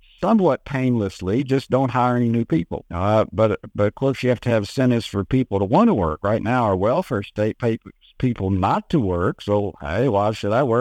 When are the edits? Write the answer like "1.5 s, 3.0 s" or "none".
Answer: 2.8 s